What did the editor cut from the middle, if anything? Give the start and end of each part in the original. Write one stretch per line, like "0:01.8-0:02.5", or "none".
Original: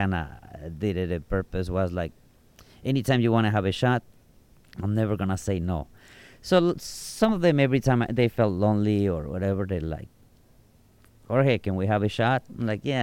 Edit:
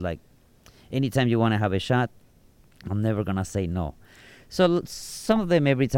none